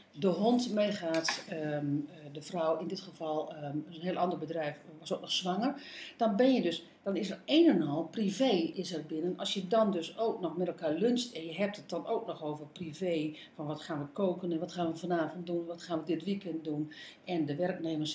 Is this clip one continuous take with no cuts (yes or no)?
no